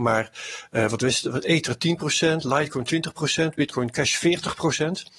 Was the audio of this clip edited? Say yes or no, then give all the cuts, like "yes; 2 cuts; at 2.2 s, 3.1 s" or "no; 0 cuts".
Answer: no; 0 cuts